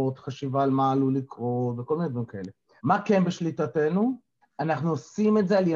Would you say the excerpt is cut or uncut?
cut